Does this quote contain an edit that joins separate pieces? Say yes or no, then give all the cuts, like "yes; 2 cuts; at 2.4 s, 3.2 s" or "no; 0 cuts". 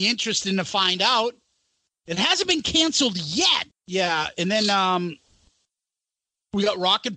yes; 1 cut; at 3.7 s